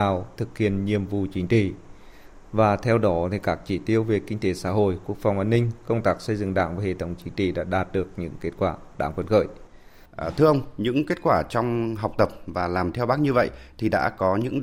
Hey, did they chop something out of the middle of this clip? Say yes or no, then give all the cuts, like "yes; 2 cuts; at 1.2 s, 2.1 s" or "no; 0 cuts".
no; 0 cuts